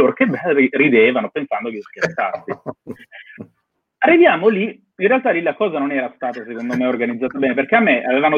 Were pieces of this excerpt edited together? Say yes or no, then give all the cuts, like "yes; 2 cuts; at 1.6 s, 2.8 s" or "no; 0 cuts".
no; 0 cuts